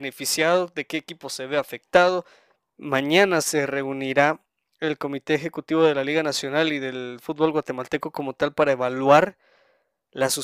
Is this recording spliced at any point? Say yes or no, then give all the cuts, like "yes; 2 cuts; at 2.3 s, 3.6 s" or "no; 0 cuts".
yes; 1 cut; at 2.7 s